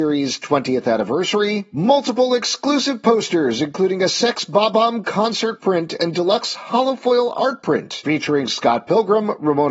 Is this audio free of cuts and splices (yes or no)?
yes